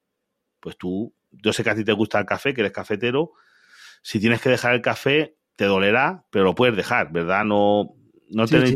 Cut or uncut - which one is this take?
uncut